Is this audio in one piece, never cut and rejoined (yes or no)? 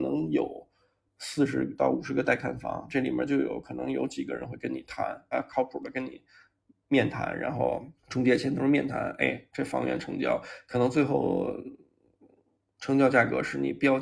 no